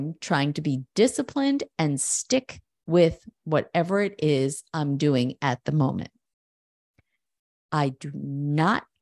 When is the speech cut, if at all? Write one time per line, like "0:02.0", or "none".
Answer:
0:07.6

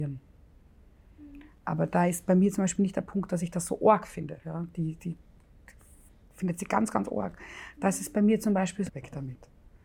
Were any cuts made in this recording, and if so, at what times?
0:01.6
0:04.4
0:08.9

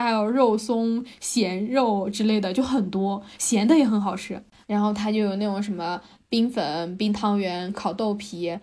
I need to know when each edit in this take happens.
0:04.6
0:07.7

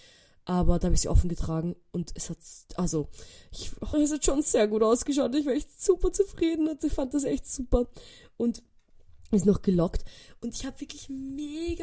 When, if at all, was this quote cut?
0:03.9

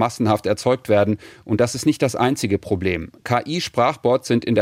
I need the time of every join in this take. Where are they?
none

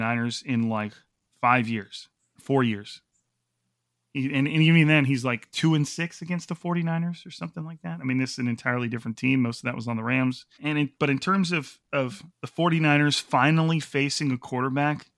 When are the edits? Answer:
0:02.4
0:10.6
0:12.3

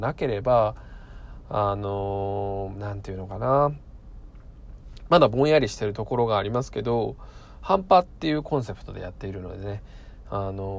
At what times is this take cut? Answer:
none

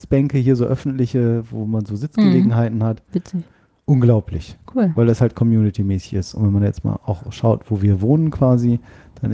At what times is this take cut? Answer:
0:04.6

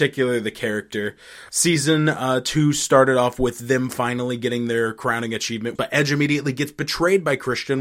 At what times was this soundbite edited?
0:01.5
0:05.8

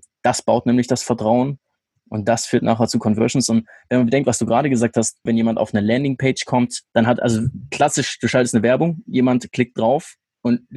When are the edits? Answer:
0:05.3
0:06.9

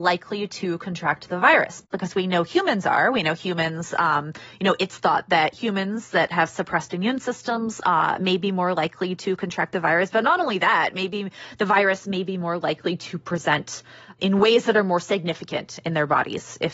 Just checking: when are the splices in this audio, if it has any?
none

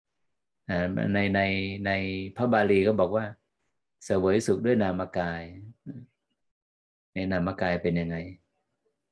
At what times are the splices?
none

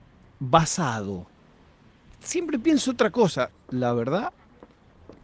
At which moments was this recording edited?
0:03.5

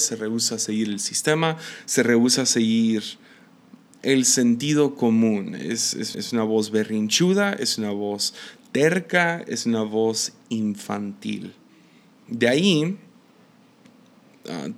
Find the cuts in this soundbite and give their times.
0:06.1

